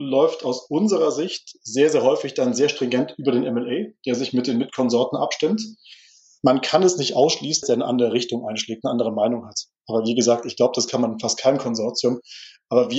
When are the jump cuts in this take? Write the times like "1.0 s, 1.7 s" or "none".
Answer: 7.6 s